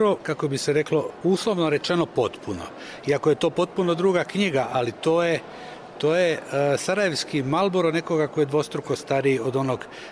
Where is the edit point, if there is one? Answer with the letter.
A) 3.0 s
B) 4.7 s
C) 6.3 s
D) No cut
D